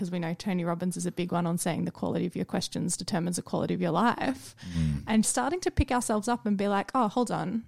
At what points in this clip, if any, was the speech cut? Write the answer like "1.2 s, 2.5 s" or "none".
5.2 s